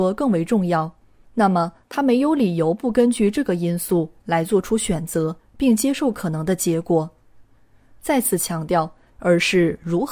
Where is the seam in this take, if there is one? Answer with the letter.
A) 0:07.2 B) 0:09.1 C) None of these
B